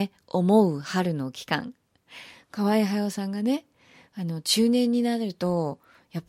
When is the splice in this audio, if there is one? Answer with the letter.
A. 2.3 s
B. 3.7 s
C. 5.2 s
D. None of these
D